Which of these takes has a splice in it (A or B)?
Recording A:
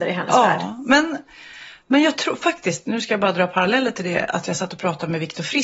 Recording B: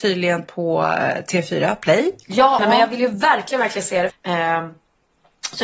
B